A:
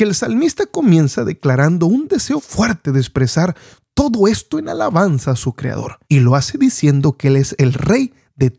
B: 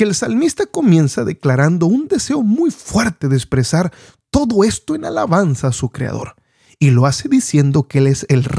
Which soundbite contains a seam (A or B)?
A